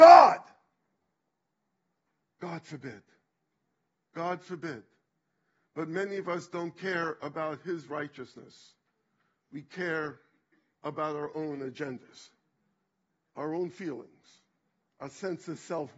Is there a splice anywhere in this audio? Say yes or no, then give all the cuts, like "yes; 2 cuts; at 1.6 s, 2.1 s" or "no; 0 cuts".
no; 0 cuts